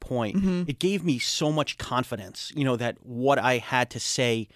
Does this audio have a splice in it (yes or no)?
no